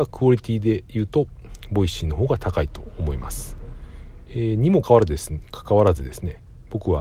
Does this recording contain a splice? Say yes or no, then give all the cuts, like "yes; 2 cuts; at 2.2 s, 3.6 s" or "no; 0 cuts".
yes; 1 cut; at 4.8 s